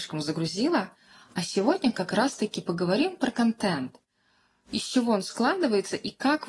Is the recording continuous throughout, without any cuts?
yes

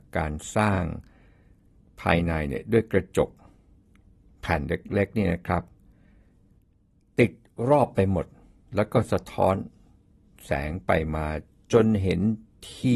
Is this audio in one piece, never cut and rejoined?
yes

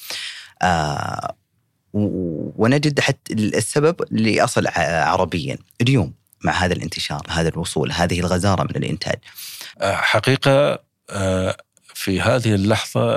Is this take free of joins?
no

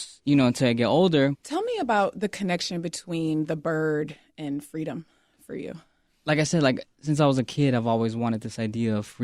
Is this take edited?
yes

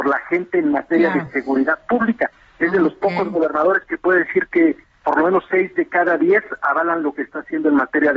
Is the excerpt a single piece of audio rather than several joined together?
yes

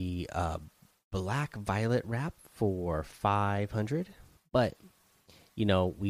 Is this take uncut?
no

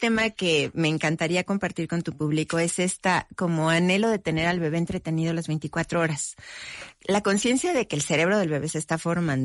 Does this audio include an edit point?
no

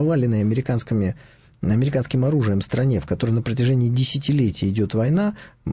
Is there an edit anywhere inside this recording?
no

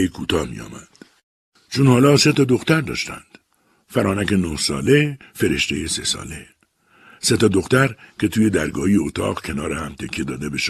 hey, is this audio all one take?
no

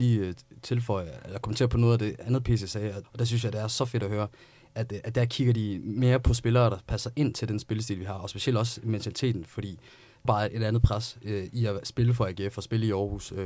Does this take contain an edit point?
yes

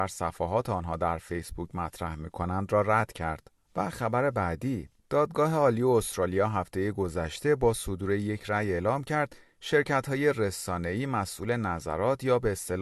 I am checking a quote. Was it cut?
yes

